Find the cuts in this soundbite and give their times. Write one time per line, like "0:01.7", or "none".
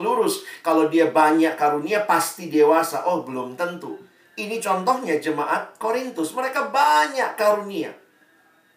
none